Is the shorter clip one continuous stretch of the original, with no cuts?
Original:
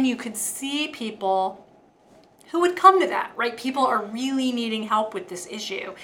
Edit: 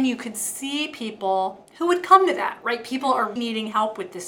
no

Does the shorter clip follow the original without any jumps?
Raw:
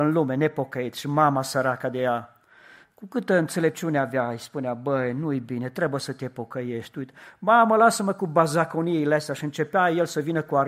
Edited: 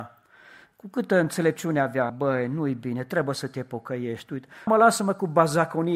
no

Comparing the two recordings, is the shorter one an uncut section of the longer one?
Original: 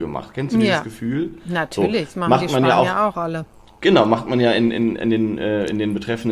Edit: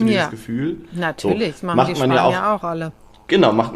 yes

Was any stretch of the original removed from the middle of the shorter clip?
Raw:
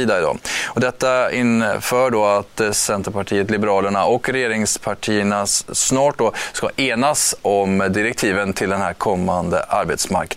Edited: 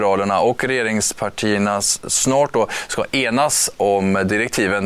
no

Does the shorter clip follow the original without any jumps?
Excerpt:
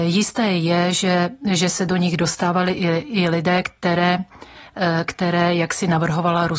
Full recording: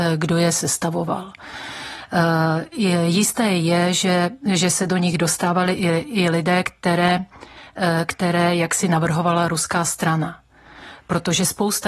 yes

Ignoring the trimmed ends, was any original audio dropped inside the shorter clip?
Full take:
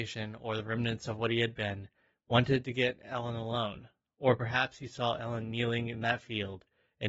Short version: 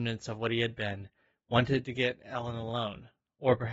no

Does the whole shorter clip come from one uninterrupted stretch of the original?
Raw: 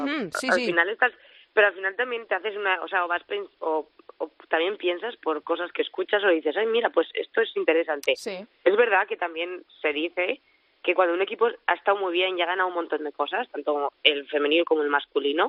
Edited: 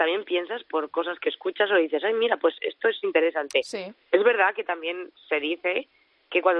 yes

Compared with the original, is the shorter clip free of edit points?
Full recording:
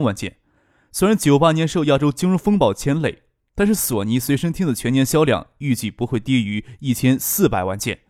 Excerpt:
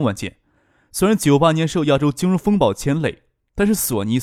yes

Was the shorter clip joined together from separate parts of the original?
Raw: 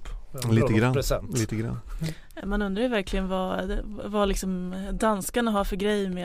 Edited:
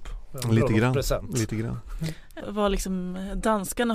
yes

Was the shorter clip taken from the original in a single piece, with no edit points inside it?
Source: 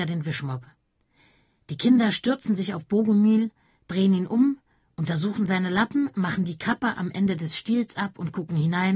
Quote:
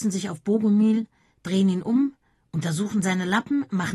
yes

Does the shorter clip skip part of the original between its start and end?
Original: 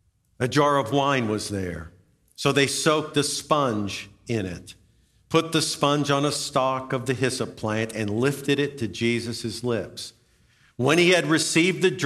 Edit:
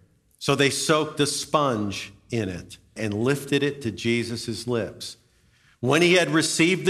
yes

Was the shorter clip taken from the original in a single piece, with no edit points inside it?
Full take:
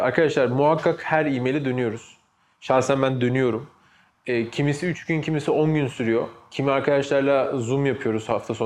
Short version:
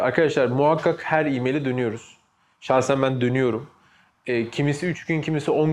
yes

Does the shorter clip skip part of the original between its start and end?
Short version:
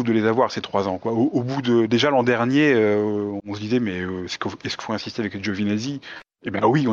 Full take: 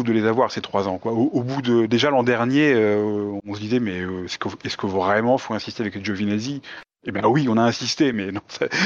yes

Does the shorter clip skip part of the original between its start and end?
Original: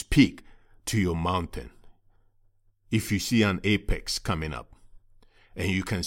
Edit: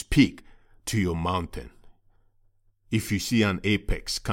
no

